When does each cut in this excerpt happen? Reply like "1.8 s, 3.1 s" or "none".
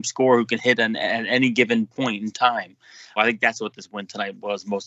3.2 s